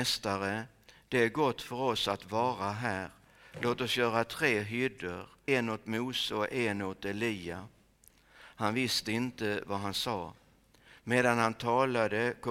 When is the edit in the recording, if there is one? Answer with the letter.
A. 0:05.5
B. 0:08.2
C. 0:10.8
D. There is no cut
A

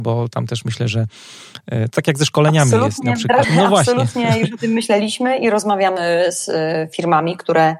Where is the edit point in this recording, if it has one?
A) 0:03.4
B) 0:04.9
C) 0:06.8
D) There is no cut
A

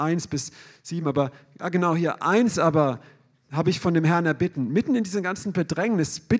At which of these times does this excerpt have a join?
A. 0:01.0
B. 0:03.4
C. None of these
C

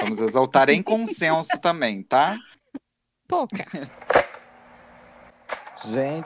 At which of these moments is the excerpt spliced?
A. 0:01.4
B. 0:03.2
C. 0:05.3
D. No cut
B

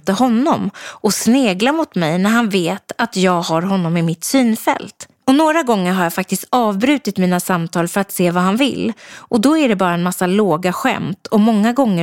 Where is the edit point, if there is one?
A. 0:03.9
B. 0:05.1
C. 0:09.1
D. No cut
D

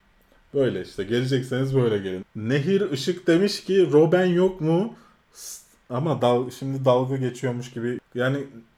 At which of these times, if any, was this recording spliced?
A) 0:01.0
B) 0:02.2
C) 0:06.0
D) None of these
B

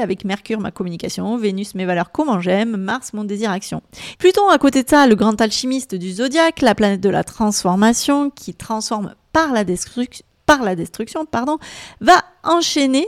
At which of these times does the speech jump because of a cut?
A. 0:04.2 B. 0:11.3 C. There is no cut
A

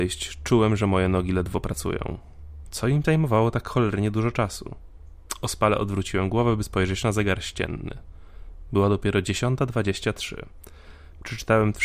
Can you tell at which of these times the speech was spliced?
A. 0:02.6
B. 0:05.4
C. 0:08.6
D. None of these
A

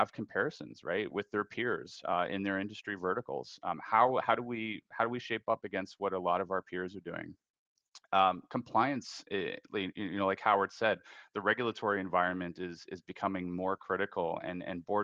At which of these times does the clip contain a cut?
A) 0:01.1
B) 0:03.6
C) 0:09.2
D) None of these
A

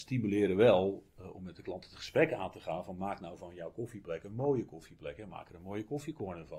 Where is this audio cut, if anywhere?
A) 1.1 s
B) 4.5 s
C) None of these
C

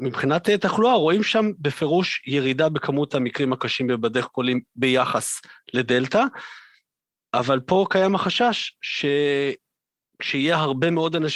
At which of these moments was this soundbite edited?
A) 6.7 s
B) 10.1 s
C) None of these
C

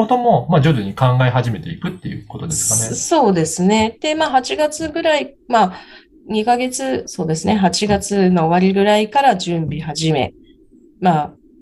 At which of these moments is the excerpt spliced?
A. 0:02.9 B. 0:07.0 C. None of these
B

